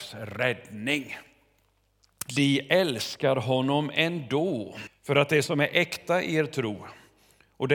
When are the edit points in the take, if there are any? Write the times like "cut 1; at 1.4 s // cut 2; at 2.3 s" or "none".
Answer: cut 1; at 2.3 s // cut 2; at 4.9 s